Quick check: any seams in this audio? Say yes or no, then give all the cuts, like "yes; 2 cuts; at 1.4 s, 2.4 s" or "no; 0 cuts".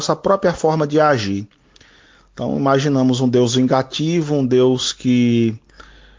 no; 0 cuts